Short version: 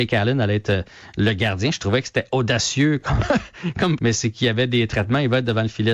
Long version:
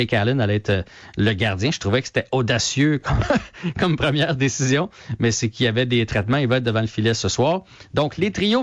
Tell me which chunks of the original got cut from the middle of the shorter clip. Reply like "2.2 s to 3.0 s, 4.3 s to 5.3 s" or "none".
4.0 s to 5.2 s